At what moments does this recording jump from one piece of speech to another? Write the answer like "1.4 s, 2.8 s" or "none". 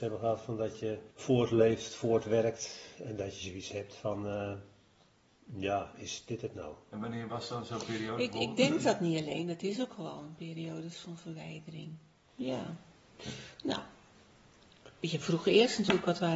1.1 s